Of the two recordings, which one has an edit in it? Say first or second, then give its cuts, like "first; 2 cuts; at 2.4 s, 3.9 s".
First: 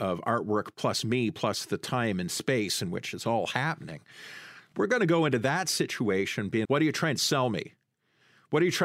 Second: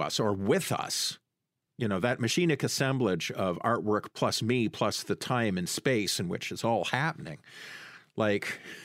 first; 2 cuts; at 4.7 s, 6.7 s